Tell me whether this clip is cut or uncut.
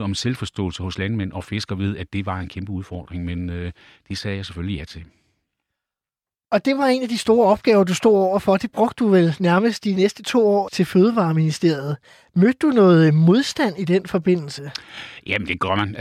cut